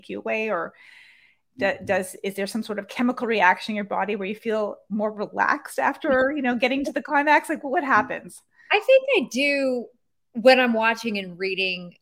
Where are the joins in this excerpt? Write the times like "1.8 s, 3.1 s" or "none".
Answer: 4.9 s